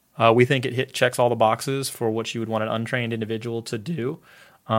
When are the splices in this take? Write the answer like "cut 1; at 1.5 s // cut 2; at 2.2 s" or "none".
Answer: none